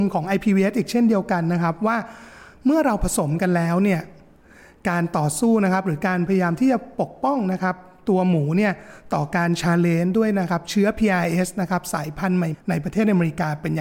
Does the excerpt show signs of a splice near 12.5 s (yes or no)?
yes